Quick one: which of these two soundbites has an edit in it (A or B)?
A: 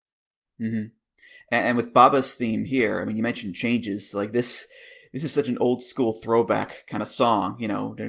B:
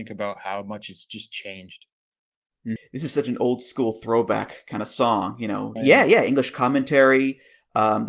B